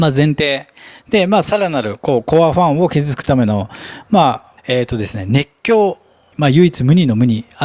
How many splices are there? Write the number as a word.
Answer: three